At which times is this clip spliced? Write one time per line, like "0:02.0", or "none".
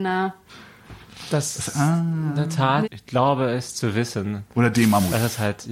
0:02.8